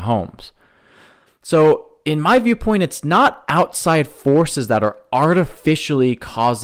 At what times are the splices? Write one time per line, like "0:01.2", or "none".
0:01.3